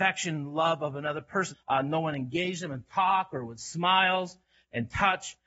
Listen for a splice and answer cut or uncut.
cut